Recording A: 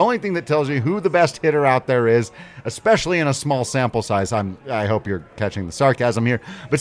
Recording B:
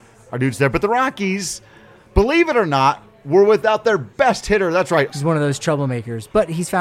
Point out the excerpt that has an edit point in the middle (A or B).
B